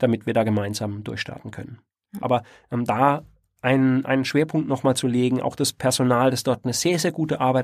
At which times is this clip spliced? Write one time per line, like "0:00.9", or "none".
0:02.2